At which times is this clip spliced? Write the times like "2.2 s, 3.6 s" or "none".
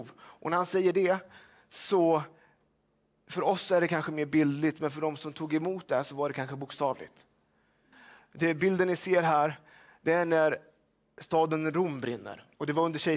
none